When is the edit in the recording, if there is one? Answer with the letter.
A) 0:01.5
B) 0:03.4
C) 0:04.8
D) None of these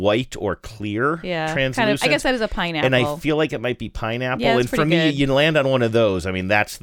D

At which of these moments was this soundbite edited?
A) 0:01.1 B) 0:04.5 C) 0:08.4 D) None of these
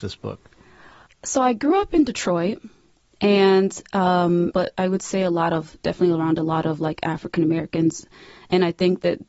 B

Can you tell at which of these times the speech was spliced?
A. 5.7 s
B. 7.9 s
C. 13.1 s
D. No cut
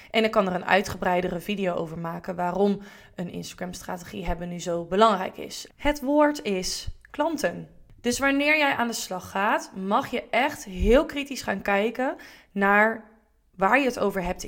A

